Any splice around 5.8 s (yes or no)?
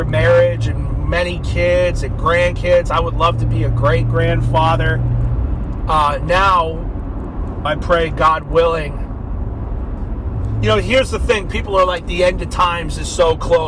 yes